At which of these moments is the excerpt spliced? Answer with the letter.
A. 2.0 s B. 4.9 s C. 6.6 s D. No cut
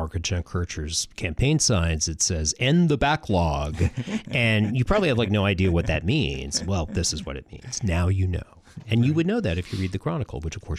D